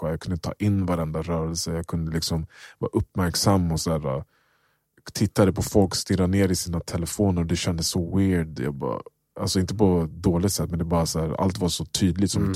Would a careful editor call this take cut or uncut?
uncut